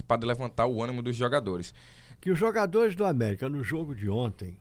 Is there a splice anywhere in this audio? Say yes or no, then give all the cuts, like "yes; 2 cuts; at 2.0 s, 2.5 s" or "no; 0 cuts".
yes; 1 cut; at 2.2 s